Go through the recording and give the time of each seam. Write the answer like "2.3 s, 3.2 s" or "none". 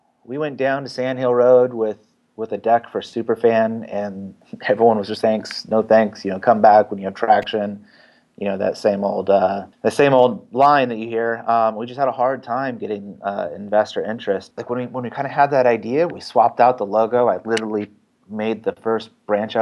5.2 s, 14.6 s, 16.1 s